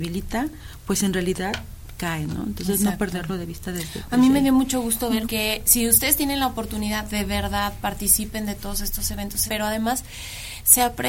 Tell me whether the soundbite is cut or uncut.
cut